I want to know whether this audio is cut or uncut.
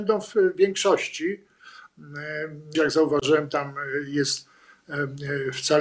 cut